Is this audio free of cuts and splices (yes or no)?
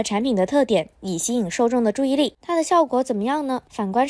no